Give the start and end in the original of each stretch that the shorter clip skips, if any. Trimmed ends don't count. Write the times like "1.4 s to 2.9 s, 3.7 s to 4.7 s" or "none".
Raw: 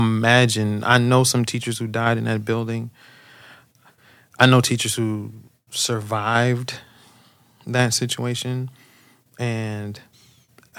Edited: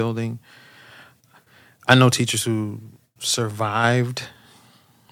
none